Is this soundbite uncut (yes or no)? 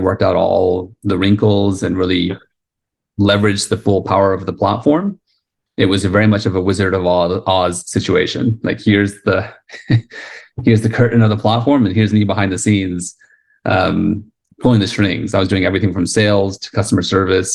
yes